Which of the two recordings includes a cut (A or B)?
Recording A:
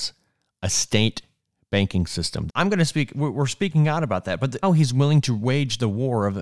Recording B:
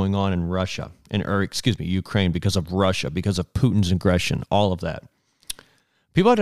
A